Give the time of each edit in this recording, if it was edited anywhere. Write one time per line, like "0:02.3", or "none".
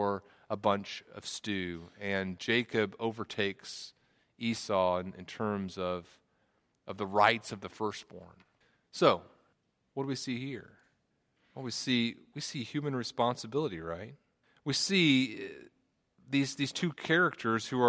none